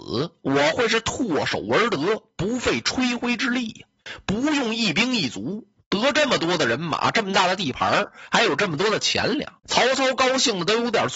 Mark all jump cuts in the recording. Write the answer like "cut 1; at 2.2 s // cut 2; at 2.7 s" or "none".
cut 1; at 9.6 s